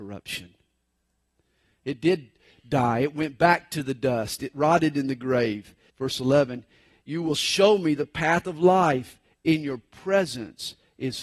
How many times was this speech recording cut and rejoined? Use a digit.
1